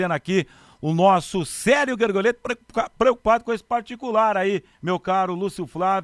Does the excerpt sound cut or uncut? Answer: cut